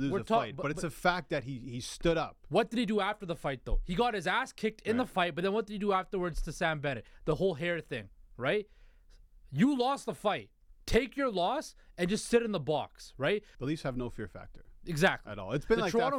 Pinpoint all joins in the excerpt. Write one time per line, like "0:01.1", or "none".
0:10.8
0:13.5